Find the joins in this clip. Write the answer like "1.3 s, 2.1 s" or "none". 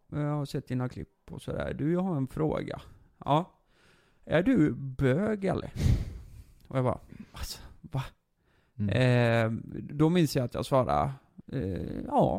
none